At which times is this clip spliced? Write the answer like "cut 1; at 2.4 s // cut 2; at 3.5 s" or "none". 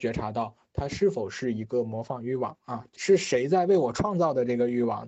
cut 1; at 3.0 s